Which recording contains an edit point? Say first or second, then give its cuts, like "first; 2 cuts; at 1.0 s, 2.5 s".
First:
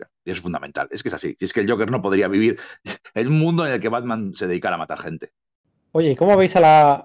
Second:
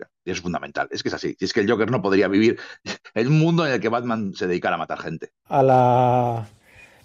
second; 1 cut; at 5.4 s